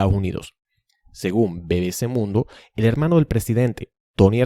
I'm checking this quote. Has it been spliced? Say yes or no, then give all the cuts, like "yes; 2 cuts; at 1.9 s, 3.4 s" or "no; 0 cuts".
no; 0 cuts